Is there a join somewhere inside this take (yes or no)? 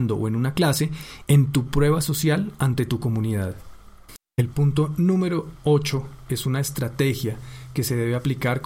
yes